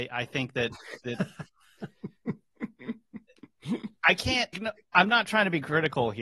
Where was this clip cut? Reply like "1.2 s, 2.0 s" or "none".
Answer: 4.5 s